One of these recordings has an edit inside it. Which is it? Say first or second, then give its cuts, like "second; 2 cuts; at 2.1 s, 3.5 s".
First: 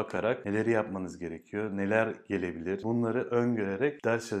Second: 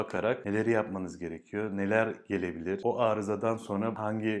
first; 1 cut; at 2.8 s